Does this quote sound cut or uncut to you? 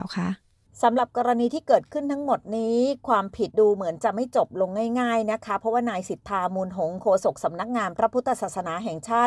cut